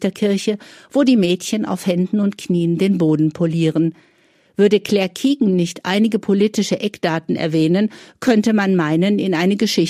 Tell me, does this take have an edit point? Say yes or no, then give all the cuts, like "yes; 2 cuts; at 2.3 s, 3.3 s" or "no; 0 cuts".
no; 0 cuts